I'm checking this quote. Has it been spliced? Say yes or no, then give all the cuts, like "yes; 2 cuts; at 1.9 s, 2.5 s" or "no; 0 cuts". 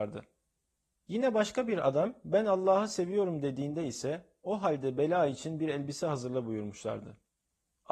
no; 0 cuts